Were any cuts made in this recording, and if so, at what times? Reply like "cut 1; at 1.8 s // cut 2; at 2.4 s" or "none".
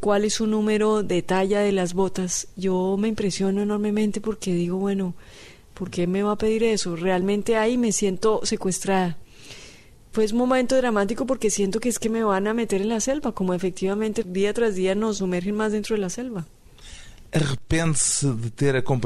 none